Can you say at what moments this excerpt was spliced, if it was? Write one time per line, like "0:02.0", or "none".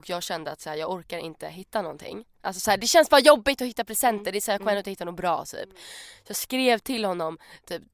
none